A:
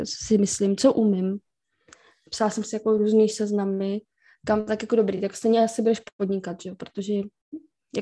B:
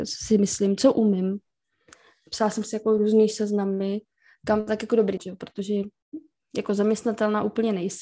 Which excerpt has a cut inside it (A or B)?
B